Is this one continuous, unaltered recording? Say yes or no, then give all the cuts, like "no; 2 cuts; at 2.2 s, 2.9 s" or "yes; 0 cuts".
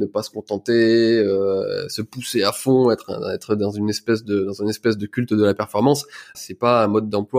no; 1 cut; at 6.3 s